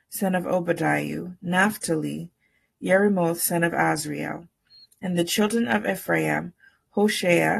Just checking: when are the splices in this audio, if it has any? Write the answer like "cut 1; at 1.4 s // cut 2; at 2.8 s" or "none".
none